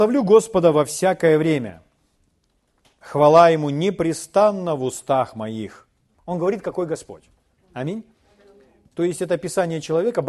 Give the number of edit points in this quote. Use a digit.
1